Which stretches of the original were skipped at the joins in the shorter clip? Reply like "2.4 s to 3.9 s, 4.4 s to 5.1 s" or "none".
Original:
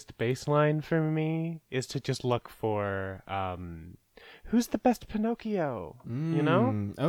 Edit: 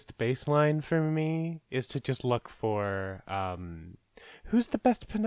none